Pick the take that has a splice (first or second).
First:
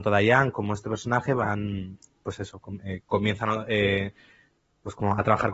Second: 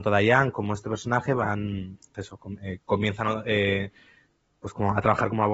second